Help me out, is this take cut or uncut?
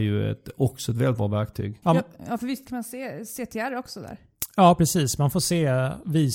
cut